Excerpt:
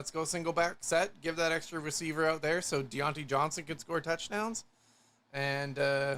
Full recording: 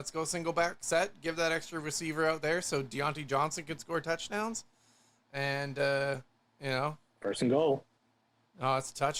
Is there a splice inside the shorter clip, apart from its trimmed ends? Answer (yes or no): no